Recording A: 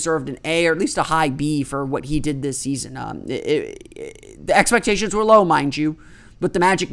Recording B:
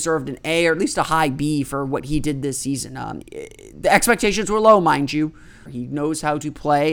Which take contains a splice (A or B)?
B